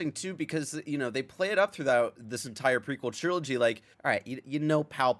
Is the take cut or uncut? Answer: cut